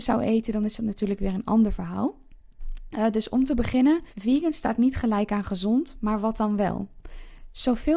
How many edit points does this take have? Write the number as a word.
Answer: one